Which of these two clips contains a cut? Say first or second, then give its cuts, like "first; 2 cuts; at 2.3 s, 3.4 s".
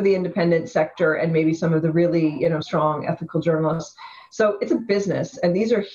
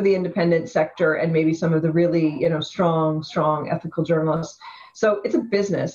first; 1 cut; at 2.6 s